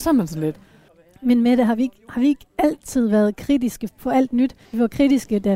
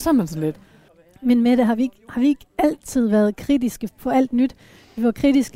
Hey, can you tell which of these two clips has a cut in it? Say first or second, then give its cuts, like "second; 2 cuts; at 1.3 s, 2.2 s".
first; 1 cut; at 4.6 s